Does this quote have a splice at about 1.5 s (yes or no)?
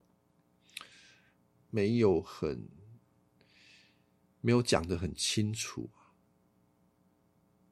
yes